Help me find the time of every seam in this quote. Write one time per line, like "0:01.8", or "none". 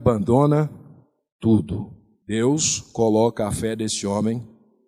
none